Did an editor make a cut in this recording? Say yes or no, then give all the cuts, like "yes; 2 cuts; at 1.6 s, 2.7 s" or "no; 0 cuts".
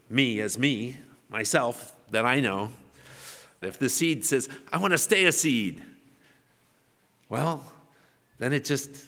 yes; 1 cut; at 3.6 s